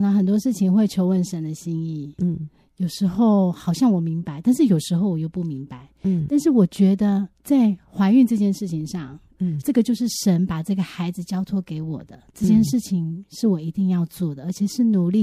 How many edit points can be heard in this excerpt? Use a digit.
2